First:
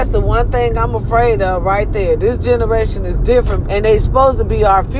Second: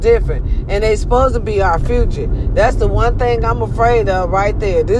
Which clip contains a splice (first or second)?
first